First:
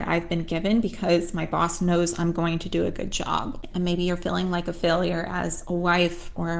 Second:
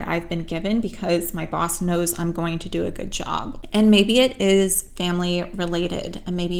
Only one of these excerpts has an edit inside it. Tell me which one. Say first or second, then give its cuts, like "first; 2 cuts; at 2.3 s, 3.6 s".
first; 1 cut; at 3.7 s